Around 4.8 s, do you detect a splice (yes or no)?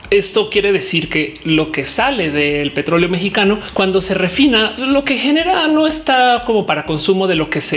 yes